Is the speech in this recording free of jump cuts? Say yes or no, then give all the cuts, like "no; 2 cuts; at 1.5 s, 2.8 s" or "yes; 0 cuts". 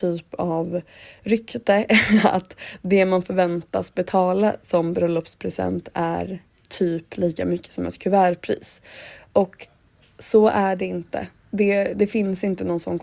yes; 0 cuts